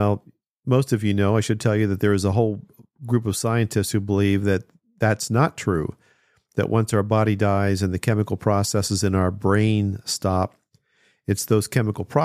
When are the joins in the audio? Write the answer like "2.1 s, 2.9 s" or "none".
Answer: none